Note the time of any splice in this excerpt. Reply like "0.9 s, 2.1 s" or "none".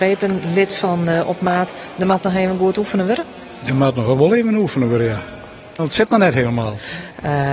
5.8 s